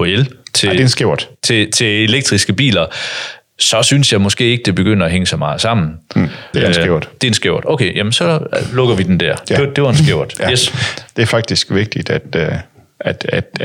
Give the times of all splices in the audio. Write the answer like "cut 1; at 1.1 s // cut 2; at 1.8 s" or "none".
cut 1; at 6.5 s